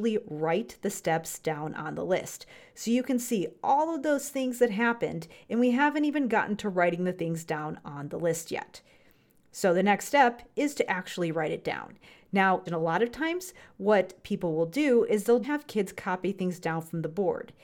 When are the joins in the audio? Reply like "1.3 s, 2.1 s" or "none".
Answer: 12.7 s, 15.4 s